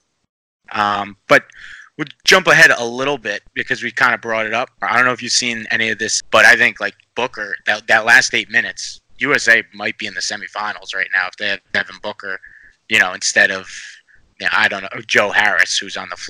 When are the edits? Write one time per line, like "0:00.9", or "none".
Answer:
0:04.8
0:06.2